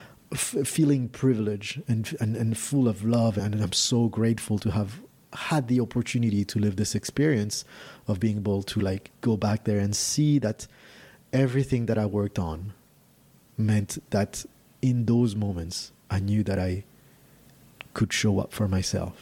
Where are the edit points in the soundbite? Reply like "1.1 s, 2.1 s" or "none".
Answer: 9.2 s